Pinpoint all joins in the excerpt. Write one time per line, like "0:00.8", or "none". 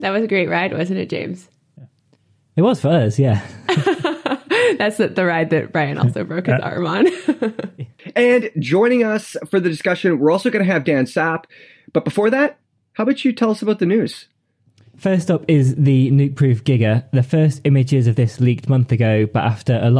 0:12.8